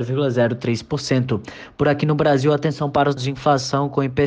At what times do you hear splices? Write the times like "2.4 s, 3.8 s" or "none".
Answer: 3.2 s